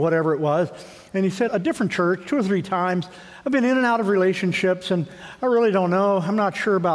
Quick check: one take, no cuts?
no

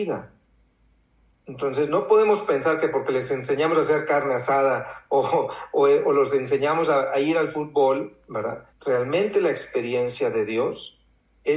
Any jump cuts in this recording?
yes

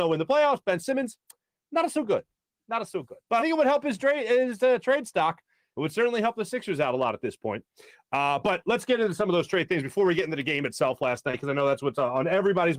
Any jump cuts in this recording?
yes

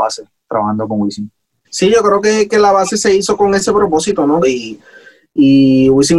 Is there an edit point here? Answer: yes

